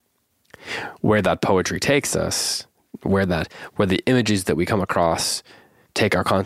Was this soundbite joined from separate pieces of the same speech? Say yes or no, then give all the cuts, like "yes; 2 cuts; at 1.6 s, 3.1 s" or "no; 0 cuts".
no; 0 cuts